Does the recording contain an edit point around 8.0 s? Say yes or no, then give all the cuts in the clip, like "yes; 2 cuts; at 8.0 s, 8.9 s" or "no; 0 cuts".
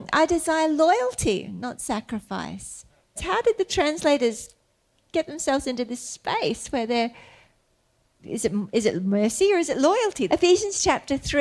no; 2 cuts; at 3.2 s, 10.3 s